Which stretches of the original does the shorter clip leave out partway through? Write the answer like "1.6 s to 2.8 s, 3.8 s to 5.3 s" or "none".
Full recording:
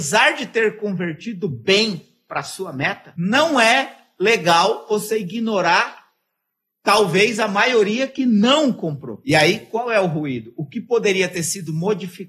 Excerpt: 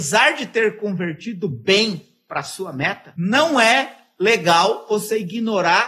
none